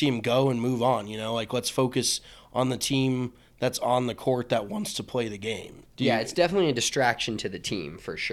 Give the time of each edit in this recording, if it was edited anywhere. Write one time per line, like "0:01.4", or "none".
0:05.8